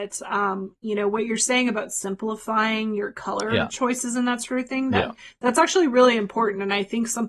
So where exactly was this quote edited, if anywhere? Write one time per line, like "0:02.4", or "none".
none